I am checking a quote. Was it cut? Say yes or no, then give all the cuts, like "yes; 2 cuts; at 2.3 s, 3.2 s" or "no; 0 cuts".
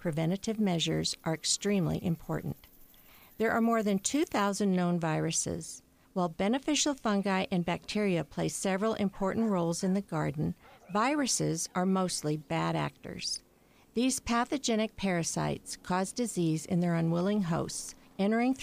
no; 0 cuts